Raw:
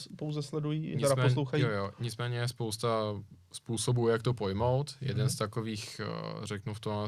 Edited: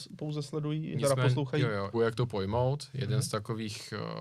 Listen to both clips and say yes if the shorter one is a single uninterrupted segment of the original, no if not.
no